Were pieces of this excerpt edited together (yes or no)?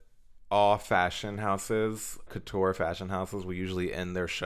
yes